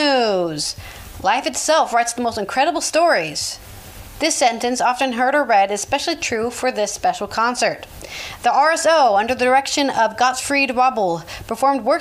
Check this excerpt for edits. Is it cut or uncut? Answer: uncut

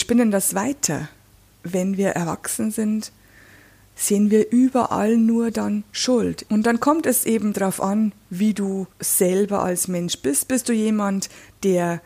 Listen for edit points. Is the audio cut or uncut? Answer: cut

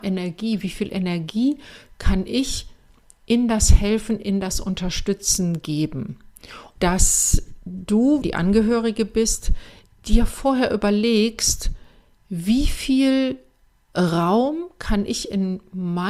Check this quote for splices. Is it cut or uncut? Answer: cut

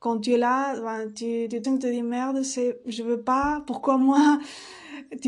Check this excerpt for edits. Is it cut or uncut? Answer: cut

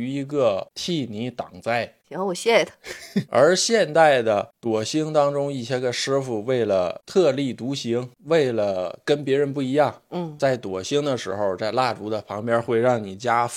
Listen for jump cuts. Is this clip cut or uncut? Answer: cut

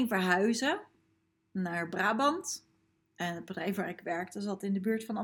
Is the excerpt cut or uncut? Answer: uncut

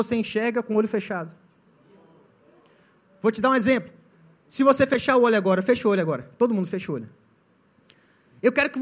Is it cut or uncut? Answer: uncut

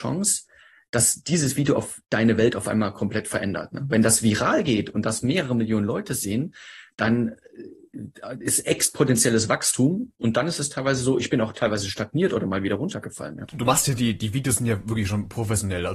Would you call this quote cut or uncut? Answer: uncut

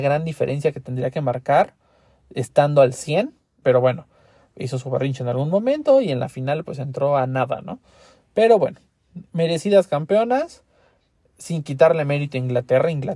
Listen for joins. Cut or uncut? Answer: cut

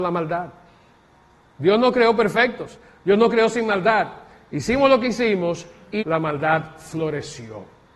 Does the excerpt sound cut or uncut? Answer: cut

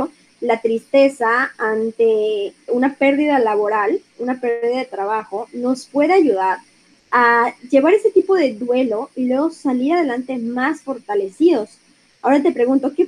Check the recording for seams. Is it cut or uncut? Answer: cut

